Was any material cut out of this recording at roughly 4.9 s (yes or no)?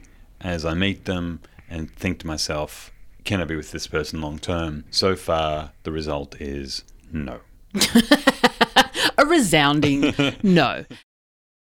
yes